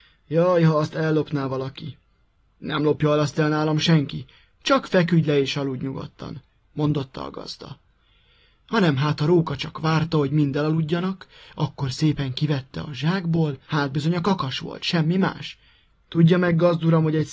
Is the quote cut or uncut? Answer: cut